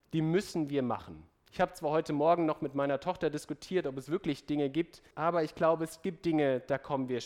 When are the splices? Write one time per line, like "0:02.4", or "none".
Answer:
0:05.1